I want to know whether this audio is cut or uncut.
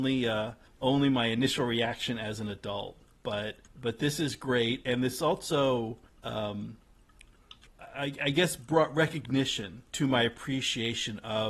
uncut